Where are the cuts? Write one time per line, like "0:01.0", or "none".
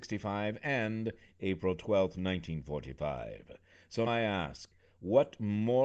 0:04.1